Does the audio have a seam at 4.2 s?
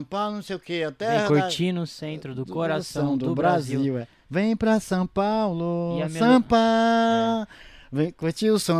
no; 0 cuts

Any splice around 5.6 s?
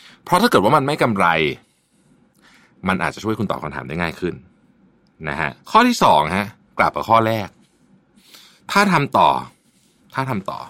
yes; 1 cut; at 5.6 s

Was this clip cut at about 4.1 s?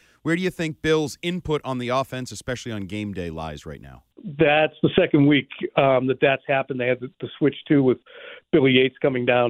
yes; 1 cut; at 4.1 s

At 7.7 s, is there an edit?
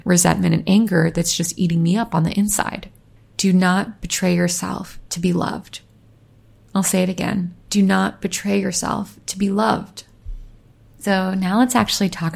yes; 2 cuts; at 3.2 s, 7.7 s

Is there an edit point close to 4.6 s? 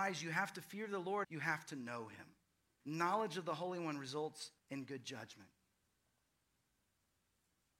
yes; 3 cuts; at 1.2 s, 2.8 s, 4.6 s

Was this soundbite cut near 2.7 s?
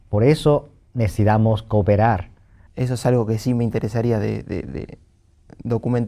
yes; 1 cut; at 2.7 s

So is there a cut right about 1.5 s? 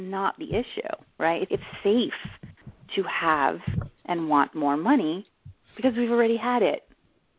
yes; 1 cut; at 1.5 s

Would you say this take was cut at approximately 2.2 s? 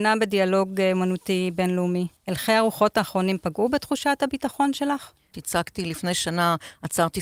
yes; 2 cuts; at 2.2 s, 5.3 s

